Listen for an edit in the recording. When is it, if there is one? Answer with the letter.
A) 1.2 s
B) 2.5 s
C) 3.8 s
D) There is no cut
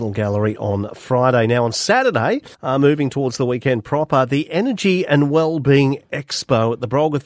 B